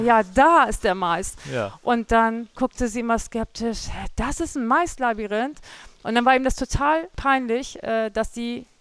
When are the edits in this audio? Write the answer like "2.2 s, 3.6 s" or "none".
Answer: none